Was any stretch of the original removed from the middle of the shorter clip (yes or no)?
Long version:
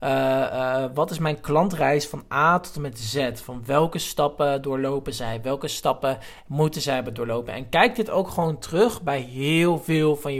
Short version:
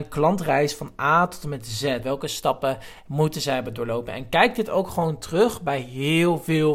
yes